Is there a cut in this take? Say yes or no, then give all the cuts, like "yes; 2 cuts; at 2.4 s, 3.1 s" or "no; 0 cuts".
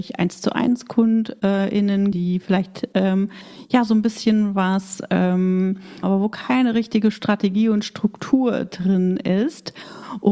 yes; 2 cuts; at 2.1 s, 6.0 s